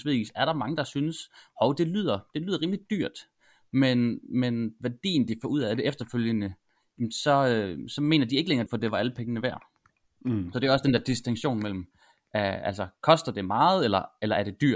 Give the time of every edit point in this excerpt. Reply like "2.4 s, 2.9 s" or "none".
8.7 s

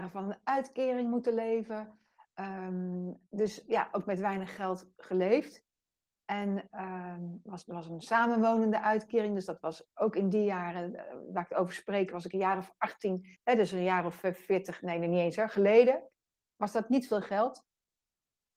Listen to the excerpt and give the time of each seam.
13.4 s

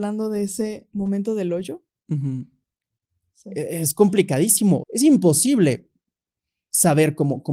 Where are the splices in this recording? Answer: 3.3 s, 4.8 s

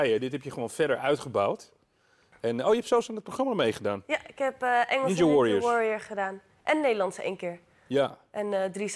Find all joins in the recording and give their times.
none

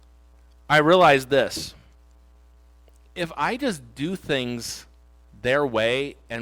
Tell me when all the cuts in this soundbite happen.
none

